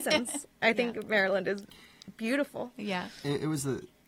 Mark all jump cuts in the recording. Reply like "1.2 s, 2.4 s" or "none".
none